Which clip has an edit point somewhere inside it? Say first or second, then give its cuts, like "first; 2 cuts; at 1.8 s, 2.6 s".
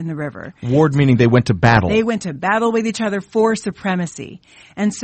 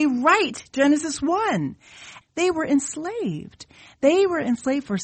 second; 1 cut; at 2.2 s